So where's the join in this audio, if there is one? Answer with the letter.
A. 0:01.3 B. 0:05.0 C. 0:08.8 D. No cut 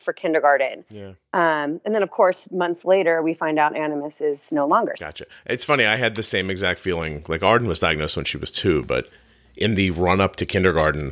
B